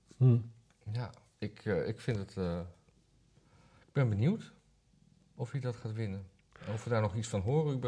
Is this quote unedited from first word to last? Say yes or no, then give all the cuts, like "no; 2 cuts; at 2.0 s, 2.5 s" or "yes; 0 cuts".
yes; 0 cuts